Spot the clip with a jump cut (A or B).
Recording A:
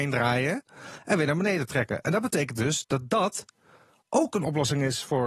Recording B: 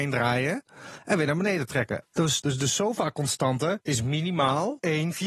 B